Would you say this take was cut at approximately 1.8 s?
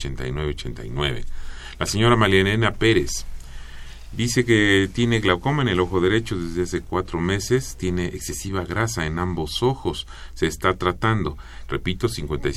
no; 1 cut; at 11.7 s

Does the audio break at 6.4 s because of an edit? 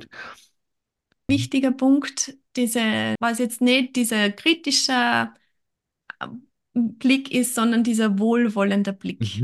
no; 2 cuts; at 1.3 s, 3.2 s

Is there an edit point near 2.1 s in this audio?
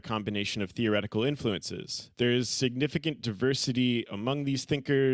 yes; 1 cut; at 2.1 s

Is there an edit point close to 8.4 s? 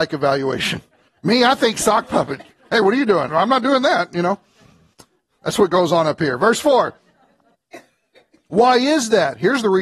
no; 1 cut; at 3.3 s

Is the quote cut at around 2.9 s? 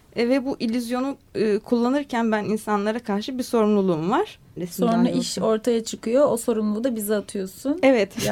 no; 1 cut; at 4.6 s

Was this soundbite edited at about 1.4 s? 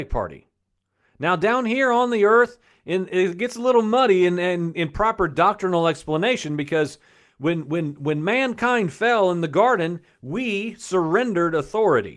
no; 0 cuts

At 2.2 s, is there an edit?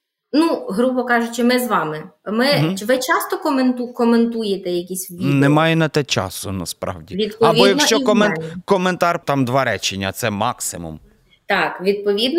no; 1 cut; at 9.2 s

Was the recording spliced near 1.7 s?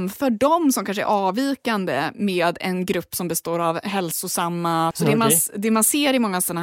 no; 1 cut; at 4.9 s

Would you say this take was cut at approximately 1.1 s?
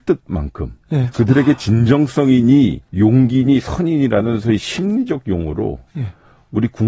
yes; 2 cuts; at 1.1 s, 2.9 s

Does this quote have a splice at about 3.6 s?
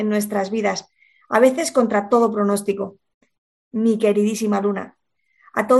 yes; 1 cut; at 3.6 s

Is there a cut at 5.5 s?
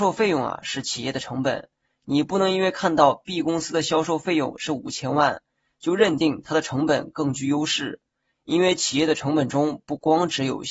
no; 0 cuts

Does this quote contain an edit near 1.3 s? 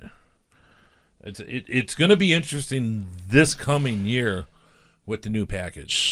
yes; 1 cut; at 1.3 s

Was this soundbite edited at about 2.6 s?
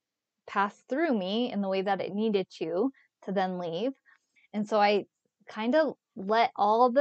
no; 1 cut; at 4.4 s

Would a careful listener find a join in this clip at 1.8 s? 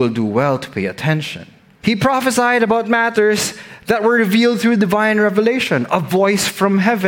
yes; 1 cut; at 1.8 s

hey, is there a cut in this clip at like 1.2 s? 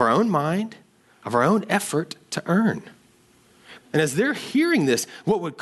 no; 1 cut; at 3.8 s

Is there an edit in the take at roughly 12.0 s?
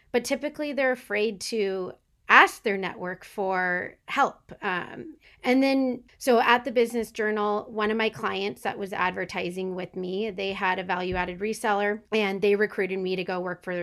yes; 1 cut; at 12.0 s

